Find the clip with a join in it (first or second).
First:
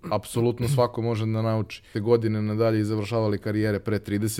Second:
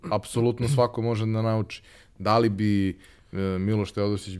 first